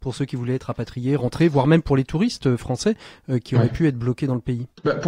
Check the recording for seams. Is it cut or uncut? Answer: uncut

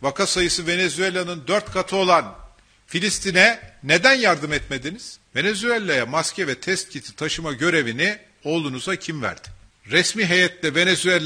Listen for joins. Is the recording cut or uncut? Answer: cut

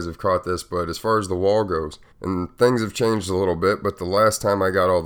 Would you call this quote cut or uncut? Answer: cut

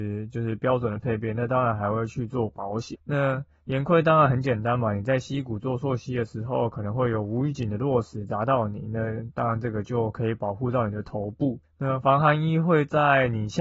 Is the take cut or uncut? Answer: uncut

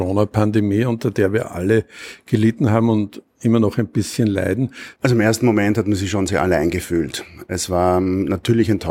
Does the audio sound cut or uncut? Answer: cut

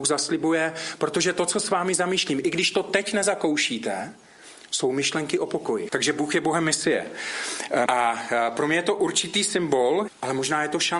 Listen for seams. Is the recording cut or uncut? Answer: cut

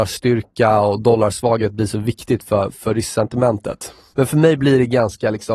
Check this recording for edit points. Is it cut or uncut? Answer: cut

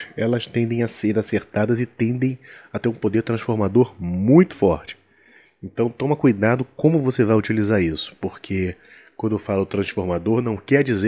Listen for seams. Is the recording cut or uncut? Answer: uncut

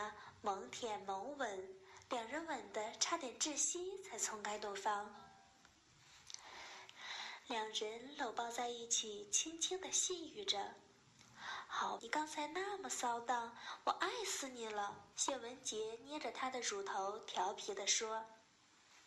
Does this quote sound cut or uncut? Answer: cut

